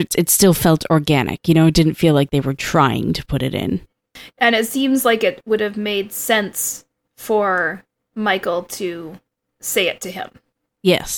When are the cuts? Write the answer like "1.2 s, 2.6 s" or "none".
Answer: 4.3 s